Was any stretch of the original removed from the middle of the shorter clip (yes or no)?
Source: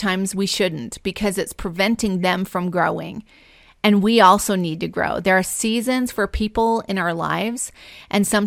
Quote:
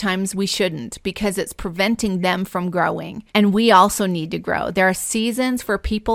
yes